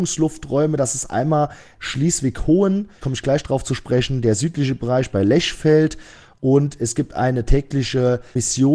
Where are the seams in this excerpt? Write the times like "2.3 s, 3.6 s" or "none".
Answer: 3.0 s